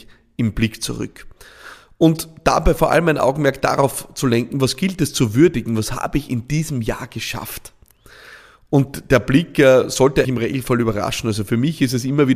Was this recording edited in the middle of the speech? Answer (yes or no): yes